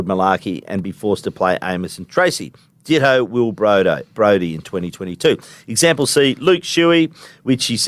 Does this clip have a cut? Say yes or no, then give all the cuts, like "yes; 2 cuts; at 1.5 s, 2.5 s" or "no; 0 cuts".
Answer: no; 0 cuts